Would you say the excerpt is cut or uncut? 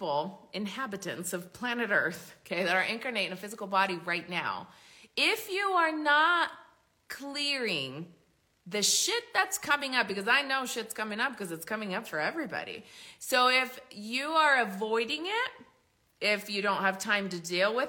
uncut